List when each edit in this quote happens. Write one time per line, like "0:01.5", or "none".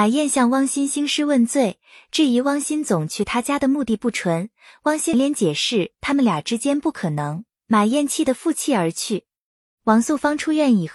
0:05.1